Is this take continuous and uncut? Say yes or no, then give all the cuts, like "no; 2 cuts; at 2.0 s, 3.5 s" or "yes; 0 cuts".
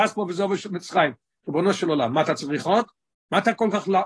yes; 0 cuts